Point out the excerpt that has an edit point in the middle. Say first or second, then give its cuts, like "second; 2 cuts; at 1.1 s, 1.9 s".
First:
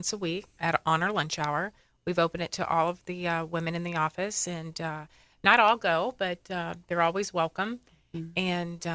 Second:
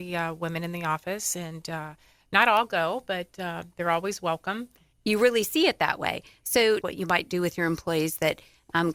second; 2 cuts; at 4.9 s, 6.8 s